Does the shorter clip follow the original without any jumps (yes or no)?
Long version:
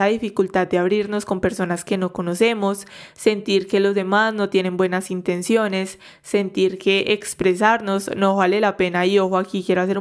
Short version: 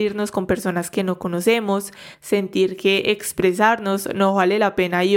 no